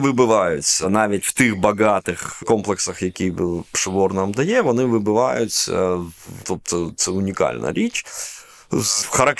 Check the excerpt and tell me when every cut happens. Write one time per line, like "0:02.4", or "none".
0:06.4